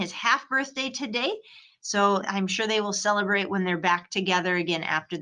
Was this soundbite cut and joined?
yes; 1 cut; at 2.2 s

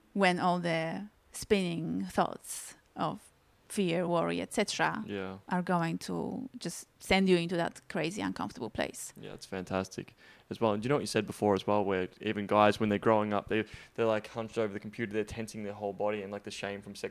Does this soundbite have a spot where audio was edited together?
no; 0 cuts

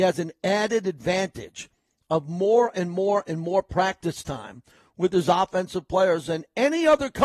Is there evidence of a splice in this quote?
no; 0 cuts

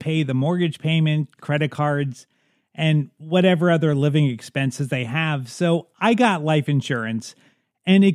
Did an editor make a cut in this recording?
yes; 1 cut; at 1.4 s

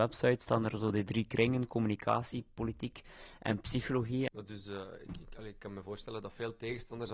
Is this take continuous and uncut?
no; 1 cut; at 4.3 s

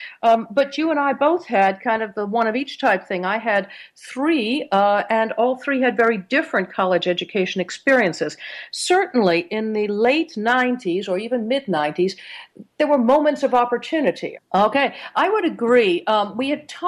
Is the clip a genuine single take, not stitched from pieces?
no; 1 cut; at 14.3 s

